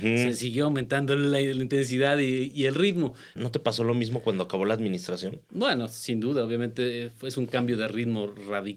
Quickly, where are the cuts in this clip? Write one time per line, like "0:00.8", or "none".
0:03.4